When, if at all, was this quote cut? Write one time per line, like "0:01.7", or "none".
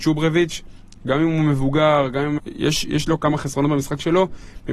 0:02.4